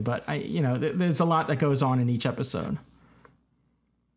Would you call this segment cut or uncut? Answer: uncut